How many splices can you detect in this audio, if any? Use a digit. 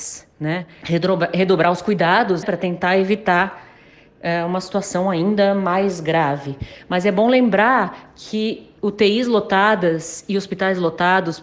2